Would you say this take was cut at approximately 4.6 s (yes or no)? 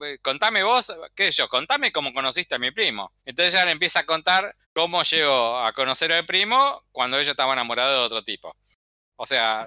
yes